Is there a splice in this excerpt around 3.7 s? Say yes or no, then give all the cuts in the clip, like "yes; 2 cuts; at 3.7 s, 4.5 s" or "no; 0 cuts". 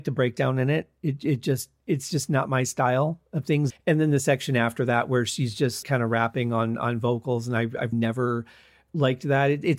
yes; 3 cuts; at 3.7 s, 5.8 s, 7.9 s